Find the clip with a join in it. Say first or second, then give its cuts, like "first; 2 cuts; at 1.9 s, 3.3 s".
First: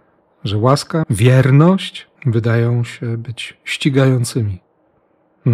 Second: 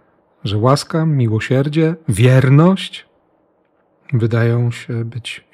first; 2 cuts; at 1.0 s, 2.2 s